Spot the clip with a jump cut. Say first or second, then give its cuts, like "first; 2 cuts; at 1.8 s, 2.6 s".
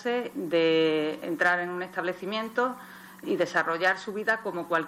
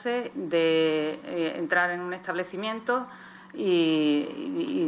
first; 2 cuts; at 1.2 s, 3.2 s